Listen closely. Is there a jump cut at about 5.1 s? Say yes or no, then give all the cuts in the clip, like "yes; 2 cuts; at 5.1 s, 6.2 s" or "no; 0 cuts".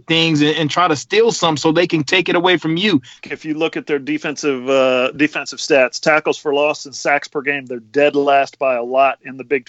no; 1 cut; at 3.2 s